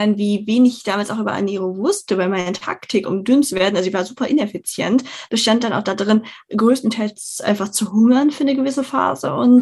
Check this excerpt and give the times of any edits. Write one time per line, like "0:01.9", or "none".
none